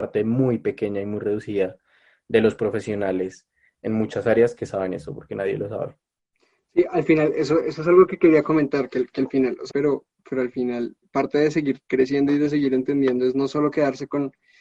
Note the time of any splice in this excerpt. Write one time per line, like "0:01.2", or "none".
0:09.7